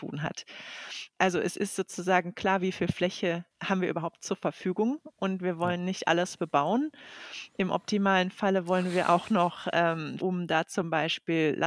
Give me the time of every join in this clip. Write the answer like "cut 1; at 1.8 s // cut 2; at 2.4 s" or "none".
cut 1; at 1.1 s // cut 2; at 10.2 s